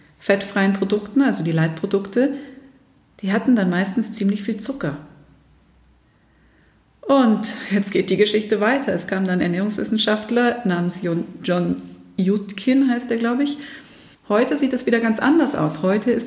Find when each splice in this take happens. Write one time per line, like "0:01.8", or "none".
0:14.1